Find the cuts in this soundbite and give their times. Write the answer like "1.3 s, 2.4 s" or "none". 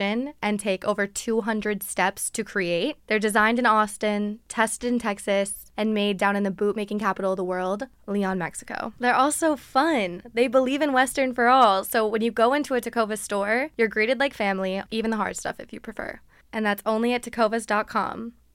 14.9 s, 16.4 s